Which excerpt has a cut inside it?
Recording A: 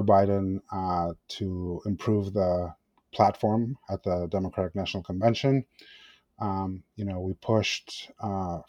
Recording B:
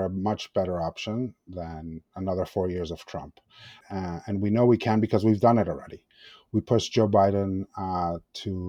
B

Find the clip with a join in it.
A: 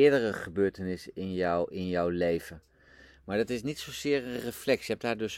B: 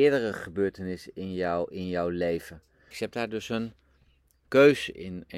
B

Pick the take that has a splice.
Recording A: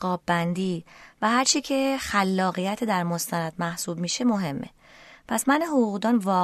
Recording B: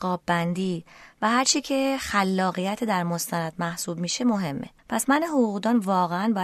B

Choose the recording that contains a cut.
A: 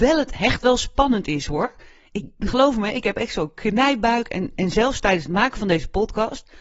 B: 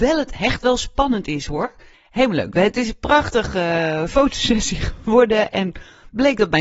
B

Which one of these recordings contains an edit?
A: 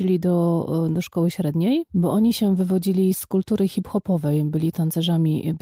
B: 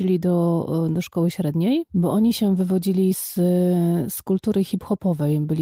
A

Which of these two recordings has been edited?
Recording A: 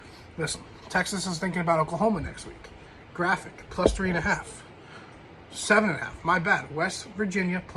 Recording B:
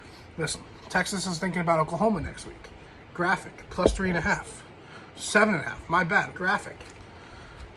B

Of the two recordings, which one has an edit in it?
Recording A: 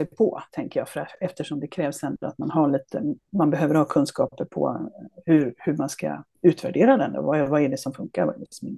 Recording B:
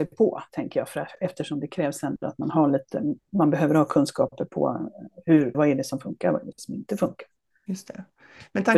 B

